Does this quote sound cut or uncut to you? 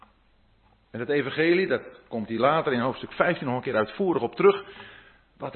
uncut